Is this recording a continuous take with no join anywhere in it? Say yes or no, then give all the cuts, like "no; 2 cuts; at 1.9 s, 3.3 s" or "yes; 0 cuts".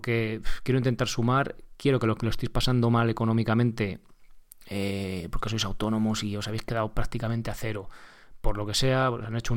yes; 0 cuts